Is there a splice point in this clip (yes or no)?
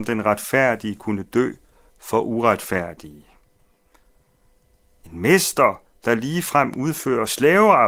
yes